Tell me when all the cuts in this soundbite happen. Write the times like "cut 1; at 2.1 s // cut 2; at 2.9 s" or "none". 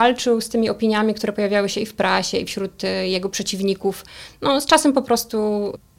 none